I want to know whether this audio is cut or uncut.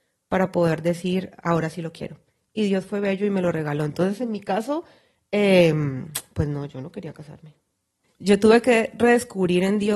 cut